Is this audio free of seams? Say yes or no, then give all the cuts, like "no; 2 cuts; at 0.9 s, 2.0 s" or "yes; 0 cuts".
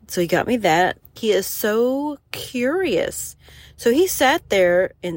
no; 1 cut; at 1.2 s